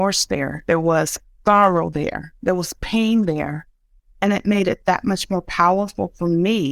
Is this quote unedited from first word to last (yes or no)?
no